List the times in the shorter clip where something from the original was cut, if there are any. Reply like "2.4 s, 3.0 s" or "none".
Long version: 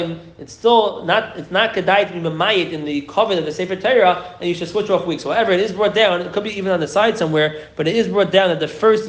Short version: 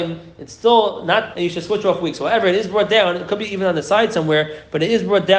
1.3 s